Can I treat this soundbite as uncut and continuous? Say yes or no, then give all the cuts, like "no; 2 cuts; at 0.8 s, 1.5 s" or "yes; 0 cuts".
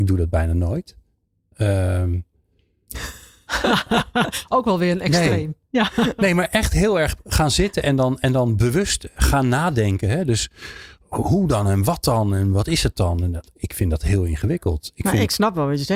yes; 0 cuts